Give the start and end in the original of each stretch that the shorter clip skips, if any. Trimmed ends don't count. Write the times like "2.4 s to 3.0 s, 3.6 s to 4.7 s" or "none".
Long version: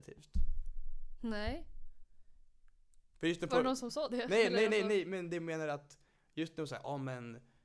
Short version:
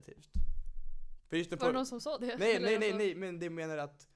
1.2 s to 3.1 s

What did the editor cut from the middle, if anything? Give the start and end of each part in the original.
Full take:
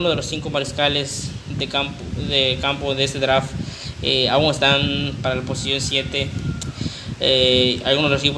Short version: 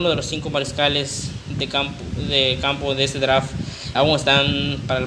3.9 s to 4.3 s

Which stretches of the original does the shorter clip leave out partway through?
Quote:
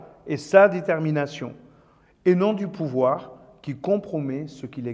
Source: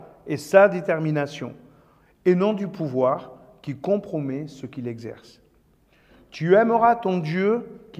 none

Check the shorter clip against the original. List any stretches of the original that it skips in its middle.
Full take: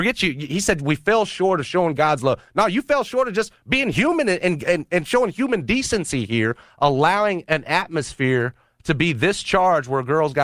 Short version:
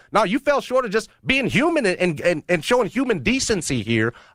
none

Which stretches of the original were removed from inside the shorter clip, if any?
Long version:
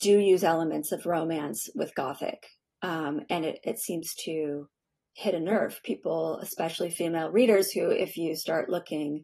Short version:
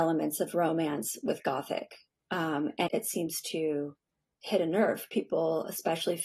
3.4 s to 3.6 s

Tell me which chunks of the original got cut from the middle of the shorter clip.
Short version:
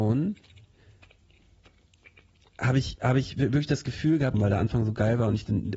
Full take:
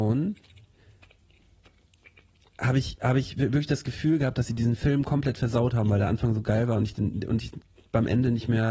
4.3 s to 5.8 s

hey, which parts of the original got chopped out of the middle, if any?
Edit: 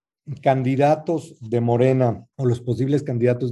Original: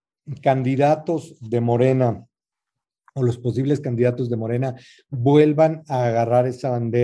2.3 s to 3.1 s

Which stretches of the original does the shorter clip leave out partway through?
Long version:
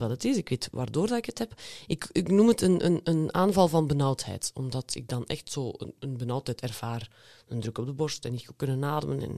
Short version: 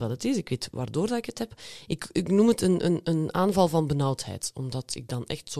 none

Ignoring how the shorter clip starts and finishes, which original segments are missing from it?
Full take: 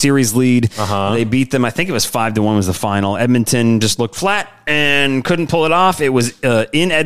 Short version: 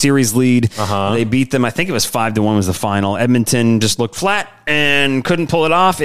none

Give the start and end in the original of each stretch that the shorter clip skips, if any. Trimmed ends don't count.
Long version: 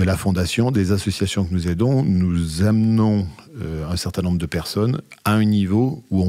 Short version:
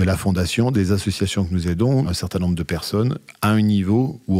2.0 s to 3.9 s

